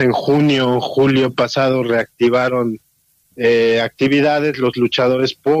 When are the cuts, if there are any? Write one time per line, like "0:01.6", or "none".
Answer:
none